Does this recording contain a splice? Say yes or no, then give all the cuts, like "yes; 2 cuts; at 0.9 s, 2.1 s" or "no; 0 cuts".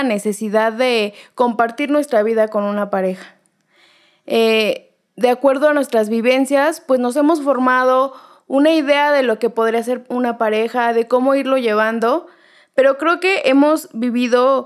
no; 0 cuts